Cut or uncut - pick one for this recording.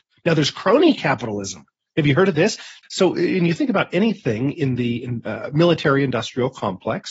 cut